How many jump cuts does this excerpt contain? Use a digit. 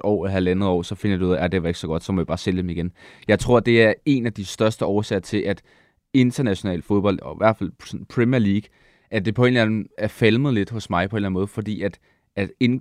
0